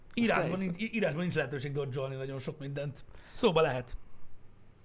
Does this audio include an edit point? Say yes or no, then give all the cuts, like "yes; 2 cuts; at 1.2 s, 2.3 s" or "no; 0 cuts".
no; 0 cuts